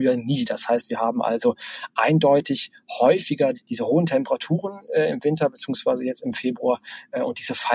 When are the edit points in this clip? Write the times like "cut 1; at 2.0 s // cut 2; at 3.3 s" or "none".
cut 1; at 3.5 s